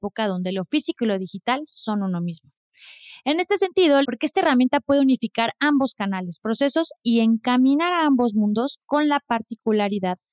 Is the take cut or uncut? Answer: cut